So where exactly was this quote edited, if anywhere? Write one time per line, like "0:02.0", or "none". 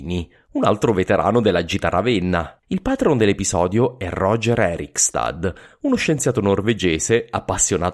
0:02.6

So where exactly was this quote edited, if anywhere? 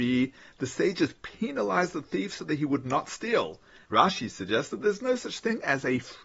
0:03.8

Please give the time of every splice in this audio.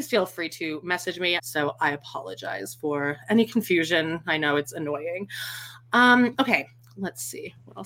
0:01.4

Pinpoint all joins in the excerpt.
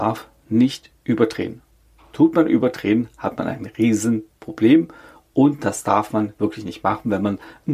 none

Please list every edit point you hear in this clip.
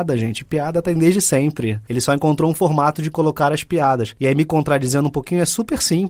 none

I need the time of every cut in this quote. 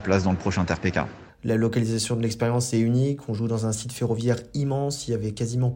0:01.3

